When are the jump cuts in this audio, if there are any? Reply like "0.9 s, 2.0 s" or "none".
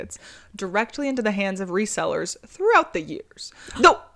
none